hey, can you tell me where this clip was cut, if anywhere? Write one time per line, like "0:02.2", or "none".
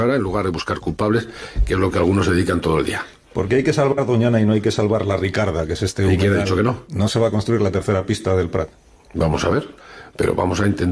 none